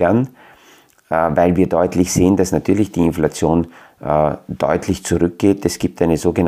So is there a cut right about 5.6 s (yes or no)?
no